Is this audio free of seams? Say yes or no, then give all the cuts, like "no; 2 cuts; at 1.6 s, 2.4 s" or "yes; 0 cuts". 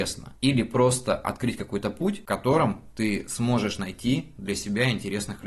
yes; 0 cuts